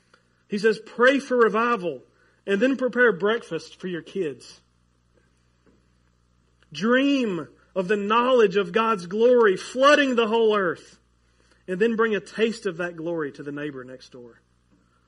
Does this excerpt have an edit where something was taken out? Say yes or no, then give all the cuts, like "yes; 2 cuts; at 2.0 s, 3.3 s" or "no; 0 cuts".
no; 0 cuts